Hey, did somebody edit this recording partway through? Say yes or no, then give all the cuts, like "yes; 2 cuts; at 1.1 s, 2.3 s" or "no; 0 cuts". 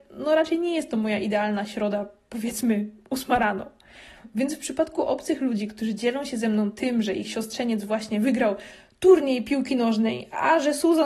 no; 0 cuts